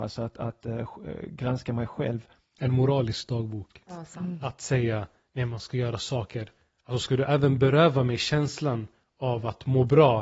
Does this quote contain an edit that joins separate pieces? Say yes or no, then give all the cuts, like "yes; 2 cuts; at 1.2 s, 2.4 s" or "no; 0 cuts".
yes; 1 cut; at 3.8 s